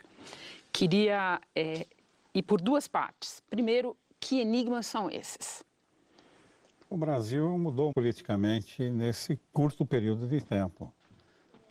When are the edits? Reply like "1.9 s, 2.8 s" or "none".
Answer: 7.9 s